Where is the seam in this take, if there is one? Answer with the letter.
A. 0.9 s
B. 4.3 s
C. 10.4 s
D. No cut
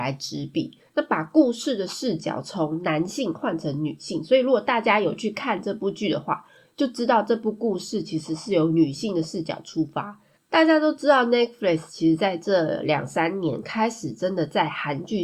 C